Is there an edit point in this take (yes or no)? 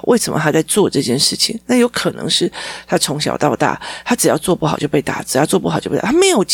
no